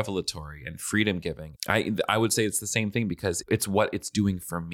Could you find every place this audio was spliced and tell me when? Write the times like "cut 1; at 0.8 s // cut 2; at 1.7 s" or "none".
cut 1; at 1.6 s // cut 2; at 3.4 s